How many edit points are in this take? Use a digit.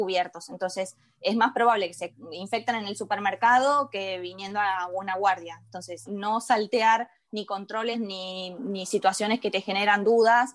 2